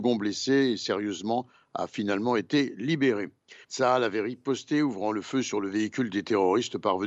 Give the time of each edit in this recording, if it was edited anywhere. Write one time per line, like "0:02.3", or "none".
0:03.6